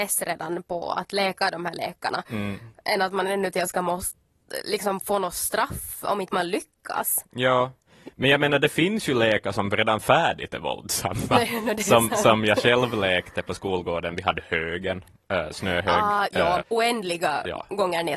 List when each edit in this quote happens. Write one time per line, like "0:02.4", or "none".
0:16.6